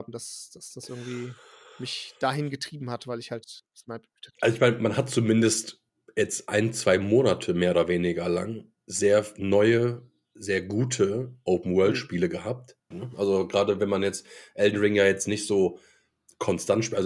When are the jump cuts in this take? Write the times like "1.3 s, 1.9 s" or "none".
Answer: 12.9 s